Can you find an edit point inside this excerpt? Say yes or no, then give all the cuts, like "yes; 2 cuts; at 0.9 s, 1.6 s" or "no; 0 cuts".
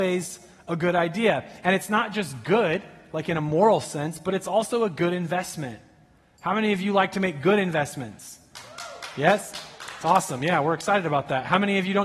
no; 0 cuts